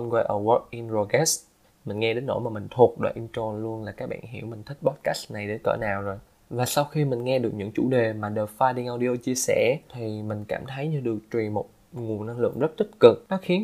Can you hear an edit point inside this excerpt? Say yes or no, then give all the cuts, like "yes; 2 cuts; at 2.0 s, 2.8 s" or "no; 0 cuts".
no; 0 cuts